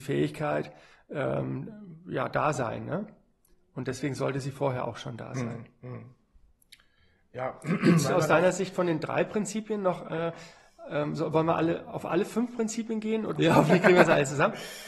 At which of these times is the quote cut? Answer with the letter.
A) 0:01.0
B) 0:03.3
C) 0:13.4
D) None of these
C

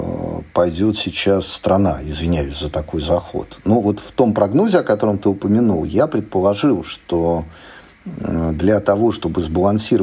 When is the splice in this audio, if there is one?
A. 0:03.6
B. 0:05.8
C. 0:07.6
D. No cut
D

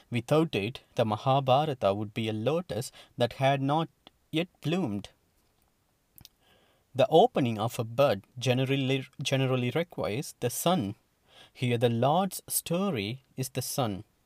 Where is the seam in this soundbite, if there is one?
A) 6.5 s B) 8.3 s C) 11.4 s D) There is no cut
D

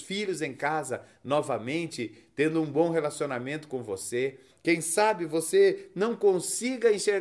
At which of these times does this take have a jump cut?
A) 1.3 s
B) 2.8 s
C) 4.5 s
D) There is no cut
C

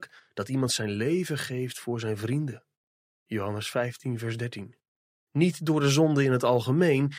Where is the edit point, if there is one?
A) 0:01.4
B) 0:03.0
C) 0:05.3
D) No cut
C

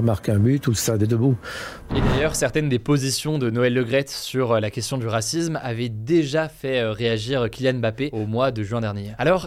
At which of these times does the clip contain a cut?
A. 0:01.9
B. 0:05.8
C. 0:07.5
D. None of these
A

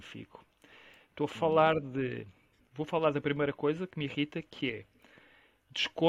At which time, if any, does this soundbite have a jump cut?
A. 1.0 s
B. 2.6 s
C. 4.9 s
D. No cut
B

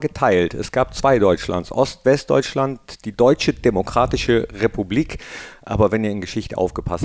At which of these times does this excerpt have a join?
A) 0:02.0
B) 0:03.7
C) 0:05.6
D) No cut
D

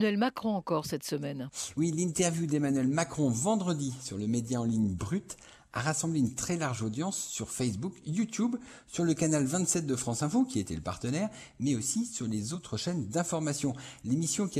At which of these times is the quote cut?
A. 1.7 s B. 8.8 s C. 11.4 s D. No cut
D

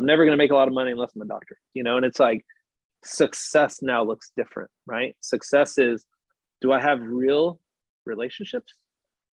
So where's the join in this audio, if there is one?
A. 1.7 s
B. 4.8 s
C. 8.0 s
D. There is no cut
A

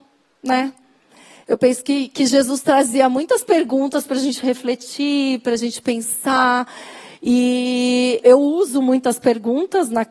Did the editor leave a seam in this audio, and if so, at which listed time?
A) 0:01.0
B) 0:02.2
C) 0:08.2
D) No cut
C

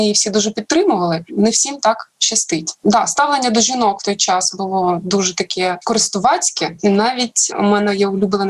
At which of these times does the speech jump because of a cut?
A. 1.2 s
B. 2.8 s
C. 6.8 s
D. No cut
D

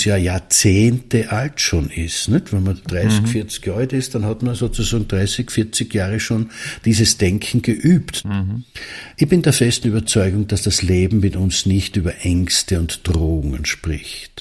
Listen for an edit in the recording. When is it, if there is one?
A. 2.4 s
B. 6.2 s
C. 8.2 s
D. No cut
C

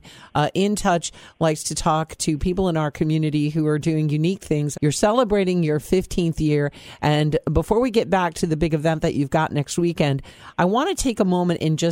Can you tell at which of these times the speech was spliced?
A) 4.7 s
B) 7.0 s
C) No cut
A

